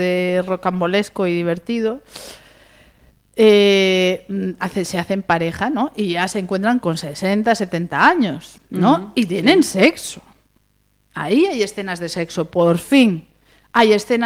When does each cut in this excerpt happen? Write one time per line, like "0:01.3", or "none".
0:06.8